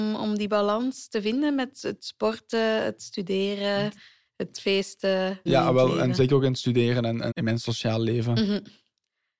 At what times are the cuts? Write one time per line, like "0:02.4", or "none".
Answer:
0:05.5
0:07.3